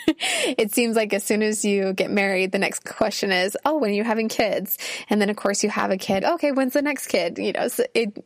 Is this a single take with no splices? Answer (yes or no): no